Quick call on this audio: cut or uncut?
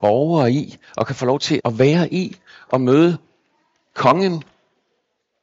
cut